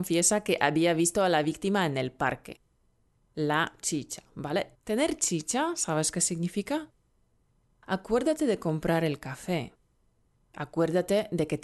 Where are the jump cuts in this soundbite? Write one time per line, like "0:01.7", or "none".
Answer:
0:04.7
0:07.6